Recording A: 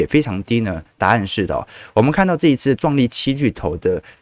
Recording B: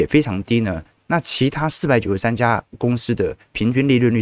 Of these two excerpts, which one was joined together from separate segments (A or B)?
B